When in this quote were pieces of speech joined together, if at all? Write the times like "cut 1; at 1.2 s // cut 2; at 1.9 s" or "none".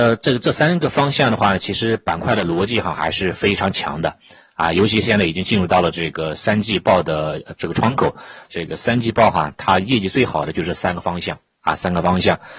cut 1; at 8.5 s